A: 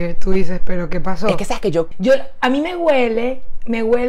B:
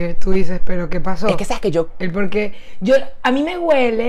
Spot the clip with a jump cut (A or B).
A